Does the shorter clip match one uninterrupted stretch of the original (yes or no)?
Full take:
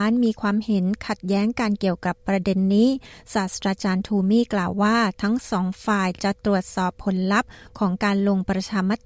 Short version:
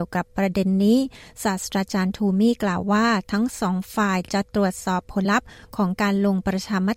no